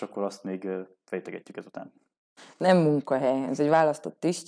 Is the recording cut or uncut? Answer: uncut